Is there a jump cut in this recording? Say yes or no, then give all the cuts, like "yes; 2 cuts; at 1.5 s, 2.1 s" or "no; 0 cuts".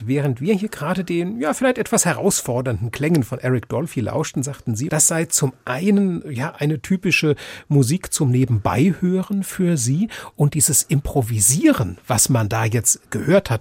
yes; 1 cut; at 4.9 s